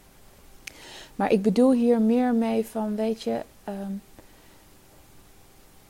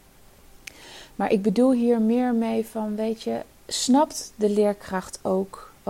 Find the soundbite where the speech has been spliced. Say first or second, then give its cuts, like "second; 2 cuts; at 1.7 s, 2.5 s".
second; 1 cut; at 3.6 s